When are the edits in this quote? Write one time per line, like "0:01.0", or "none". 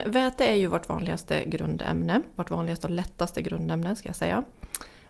0:02.4